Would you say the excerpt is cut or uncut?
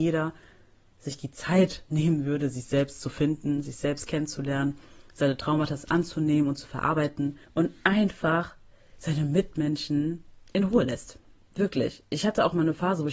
uncut